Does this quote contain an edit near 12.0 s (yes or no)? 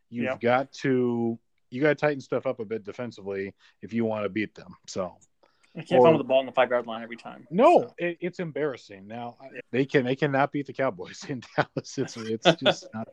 no